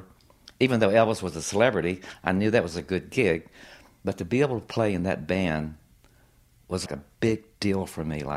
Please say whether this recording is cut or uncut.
cut